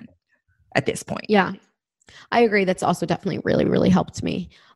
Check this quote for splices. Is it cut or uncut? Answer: uncut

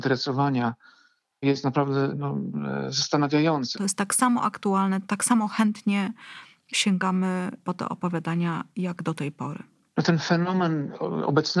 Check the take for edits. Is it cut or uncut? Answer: cut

